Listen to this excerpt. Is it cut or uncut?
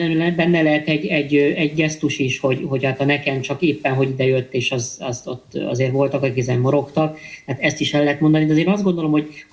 uncut